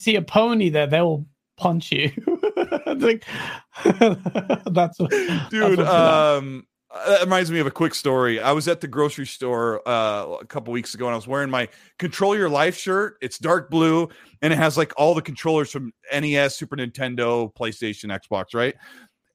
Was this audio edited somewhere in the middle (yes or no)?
no